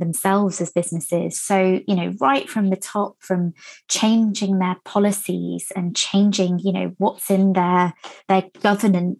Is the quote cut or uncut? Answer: cut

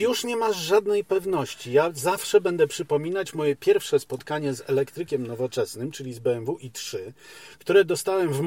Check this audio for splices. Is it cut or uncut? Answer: uncut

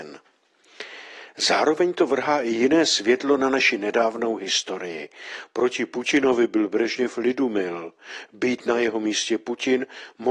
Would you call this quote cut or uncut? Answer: uncut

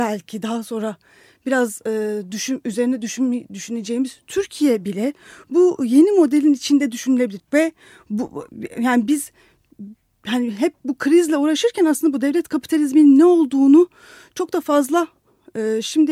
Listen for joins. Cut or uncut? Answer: cut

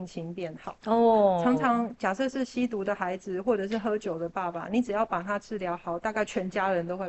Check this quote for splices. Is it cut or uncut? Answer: uncut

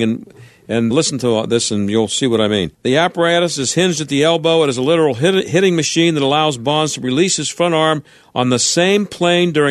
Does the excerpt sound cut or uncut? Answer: cut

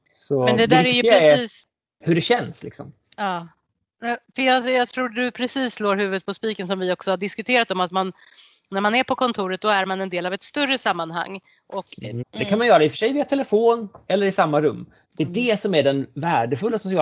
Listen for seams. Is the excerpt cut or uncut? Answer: cut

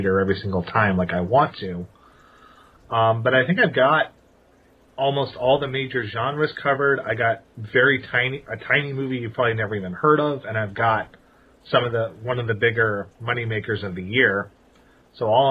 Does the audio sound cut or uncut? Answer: uncut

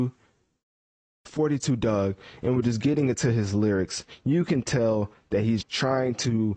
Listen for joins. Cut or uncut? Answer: cut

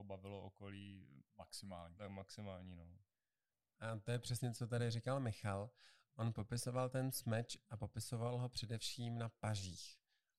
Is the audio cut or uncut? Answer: uncut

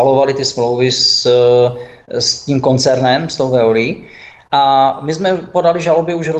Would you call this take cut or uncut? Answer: uncut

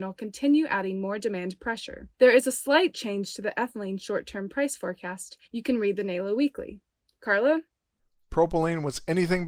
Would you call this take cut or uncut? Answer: cut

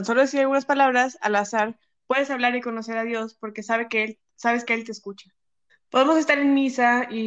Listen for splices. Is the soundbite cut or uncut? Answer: cut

